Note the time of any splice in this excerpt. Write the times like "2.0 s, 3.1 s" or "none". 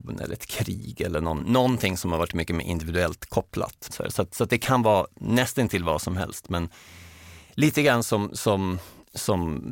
1.4 s, 3.9 s